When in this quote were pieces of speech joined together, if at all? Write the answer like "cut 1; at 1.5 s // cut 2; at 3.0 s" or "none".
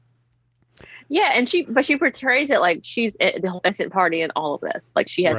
none